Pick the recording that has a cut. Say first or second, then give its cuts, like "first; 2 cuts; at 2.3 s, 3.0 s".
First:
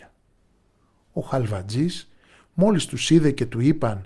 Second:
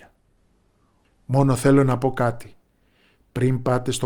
second; 1 cut; at 1.0 s